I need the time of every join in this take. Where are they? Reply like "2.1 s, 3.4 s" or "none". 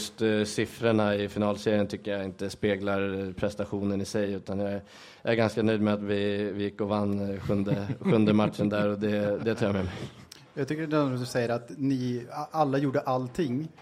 none